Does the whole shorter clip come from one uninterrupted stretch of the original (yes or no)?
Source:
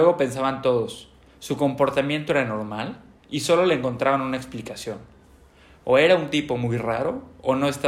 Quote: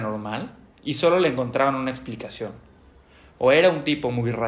yes